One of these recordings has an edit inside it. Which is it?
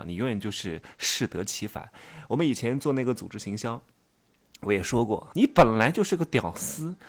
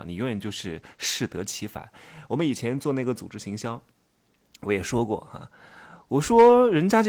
first; 1 cut; at 5.3 s

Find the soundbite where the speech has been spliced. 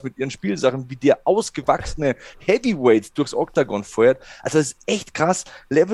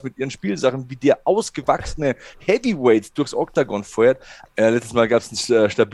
second; 1 cut; at 4.5 s

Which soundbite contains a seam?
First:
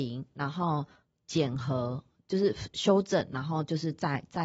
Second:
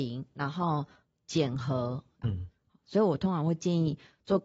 second; 1 cut; at 2.2 s

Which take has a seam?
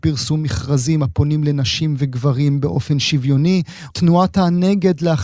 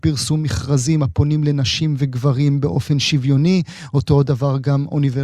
first; 1 cut; at 3.9 s

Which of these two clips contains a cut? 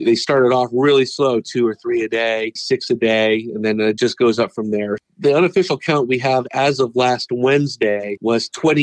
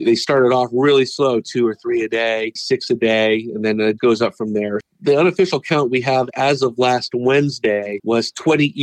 second; 1 cut; at 4.0 s

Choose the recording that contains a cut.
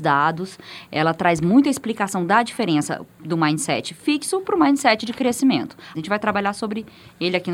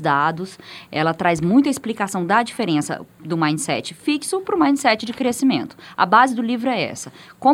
first; 1 cut; at 5.9 s

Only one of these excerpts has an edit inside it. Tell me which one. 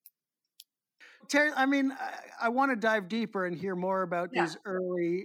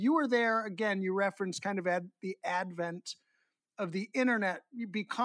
first; 1 cut; at 1.2 s

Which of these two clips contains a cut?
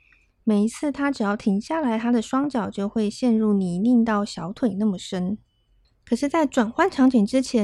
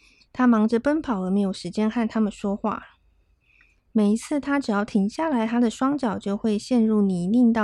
first; 1 cut; at 5.8 s

